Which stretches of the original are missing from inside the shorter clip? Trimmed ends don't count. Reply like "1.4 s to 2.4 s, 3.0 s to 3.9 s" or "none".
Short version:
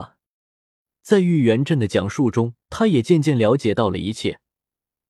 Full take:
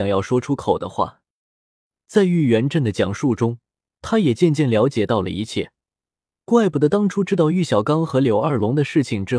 3.7 s to 3.9 s